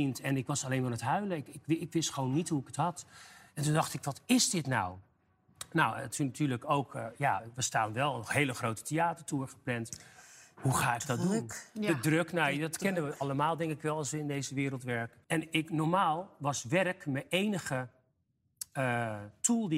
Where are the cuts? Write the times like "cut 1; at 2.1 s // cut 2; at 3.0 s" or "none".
cut 1; at 15.2 s